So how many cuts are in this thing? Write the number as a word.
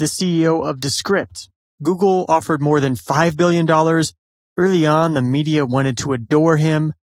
one